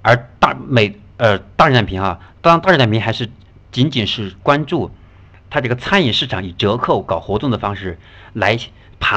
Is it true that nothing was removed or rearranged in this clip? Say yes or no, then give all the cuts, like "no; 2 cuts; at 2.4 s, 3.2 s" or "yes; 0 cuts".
no; 1 cut; at 2.3 s